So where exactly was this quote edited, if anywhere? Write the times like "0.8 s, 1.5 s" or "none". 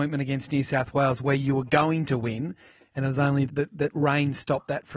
3.5 s